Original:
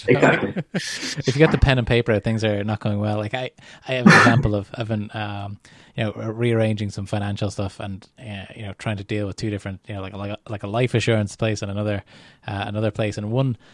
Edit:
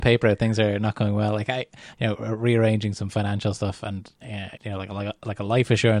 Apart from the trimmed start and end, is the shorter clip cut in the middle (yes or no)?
yes